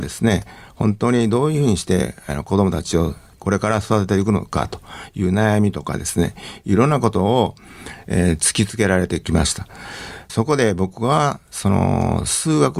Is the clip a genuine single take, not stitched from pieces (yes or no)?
no